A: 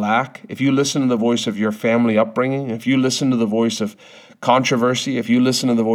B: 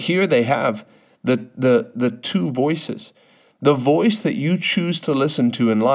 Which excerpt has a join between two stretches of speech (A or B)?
B